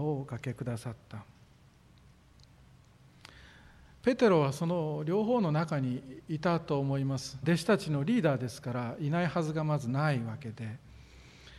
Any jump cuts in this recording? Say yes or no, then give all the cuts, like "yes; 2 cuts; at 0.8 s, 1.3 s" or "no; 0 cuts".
yes; 1 cut; at 7.4 s